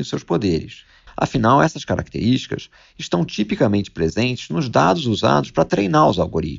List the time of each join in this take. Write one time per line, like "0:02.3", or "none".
0:01.1